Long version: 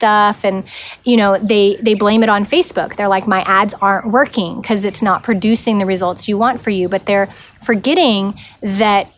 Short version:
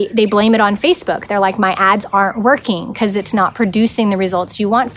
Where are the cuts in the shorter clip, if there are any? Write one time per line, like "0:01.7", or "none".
none